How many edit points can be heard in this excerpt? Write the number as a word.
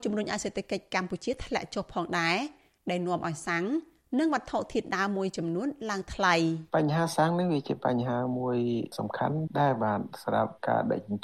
one